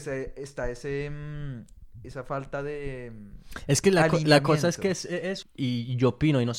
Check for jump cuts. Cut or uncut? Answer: cut